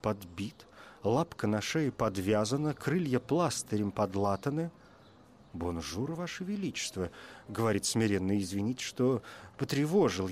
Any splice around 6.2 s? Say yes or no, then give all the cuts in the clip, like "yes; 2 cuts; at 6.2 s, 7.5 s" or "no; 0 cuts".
no; 0 cuts